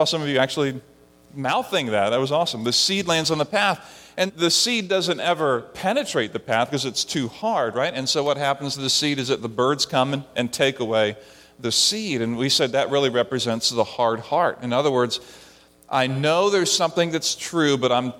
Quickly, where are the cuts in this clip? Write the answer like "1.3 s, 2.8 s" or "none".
4.3 s